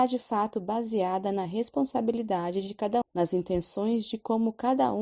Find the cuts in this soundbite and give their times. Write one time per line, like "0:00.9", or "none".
0:03.0